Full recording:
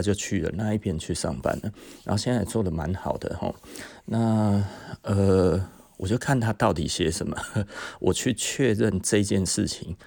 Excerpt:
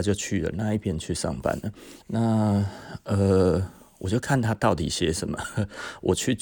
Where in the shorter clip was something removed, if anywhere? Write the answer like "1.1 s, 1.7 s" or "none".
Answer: 2.0 s